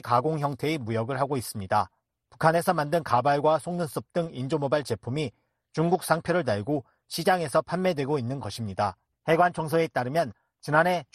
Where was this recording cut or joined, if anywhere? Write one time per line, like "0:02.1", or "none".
0:09.1